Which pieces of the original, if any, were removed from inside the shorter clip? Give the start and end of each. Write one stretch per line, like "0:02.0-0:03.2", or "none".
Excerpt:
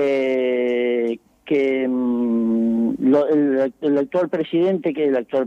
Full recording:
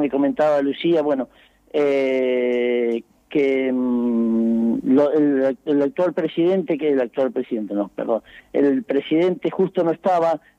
none